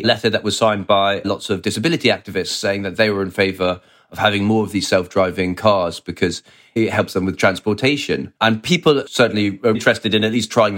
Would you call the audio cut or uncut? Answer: cut